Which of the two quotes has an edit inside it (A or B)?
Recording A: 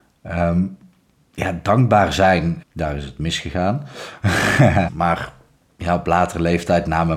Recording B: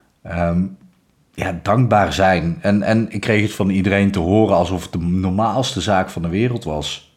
A